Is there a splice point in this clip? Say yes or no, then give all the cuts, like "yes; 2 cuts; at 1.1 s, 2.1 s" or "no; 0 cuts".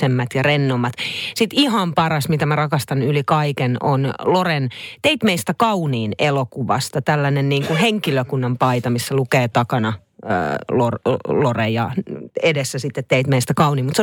no; 0 cuts